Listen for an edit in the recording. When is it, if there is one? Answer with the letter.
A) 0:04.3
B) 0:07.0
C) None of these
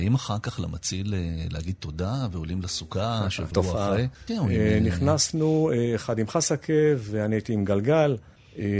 A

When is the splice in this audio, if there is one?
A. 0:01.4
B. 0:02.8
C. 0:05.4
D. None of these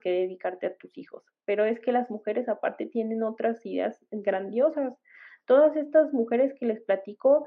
D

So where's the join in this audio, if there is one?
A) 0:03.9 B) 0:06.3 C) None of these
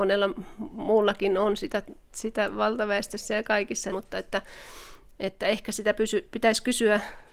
A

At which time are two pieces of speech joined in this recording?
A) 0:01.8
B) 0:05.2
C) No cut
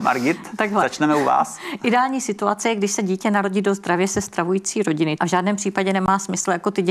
B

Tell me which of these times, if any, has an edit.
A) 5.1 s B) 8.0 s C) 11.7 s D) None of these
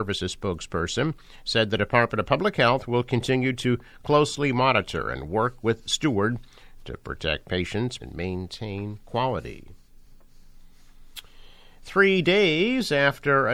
B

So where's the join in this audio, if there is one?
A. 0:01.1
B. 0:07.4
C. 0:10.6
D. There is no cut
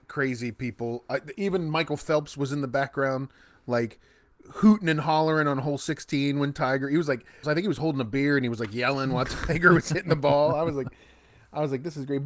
B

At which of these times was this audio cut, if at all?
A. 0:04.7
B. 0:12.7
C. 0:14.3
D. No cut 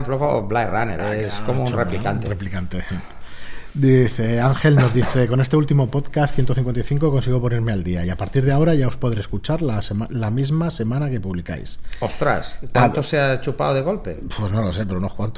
D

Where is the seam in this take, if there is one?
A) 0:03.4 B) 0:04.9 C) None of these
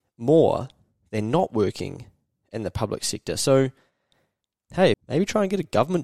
B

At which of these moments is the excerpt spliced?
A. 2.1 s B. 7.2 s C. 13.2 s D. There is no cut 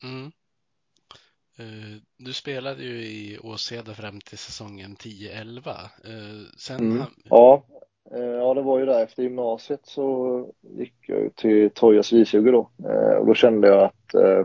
B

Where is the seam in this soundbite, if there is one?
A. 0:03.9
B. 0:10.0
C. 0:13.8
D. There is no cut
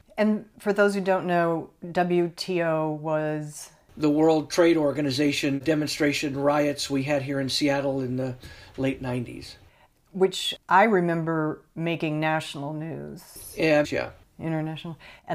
C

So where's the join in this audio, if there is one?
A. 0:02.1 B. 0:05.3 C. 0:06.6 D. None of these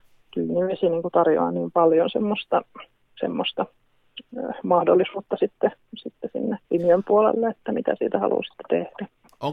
C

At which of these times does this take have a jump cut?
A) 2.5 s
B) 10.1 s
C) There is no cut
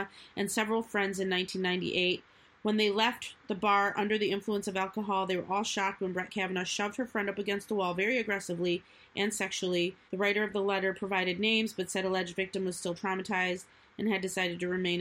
B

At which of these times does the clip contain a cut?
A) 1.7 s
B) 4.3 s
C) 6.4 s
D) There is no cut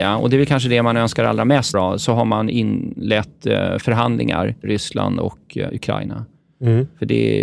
A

